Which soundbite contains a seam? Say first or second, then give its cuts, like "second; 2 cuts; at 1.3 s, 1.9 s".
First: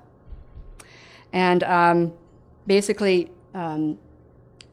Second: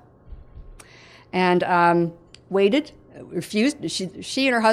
second; 1 cut; at 2.3 s